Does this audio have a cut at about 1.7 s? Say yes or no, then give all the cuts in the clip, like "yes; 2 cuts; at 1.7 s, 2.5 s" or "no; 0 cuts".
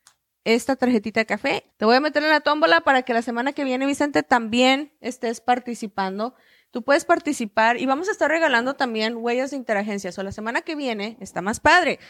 yes; 1 cut; at 1.7 s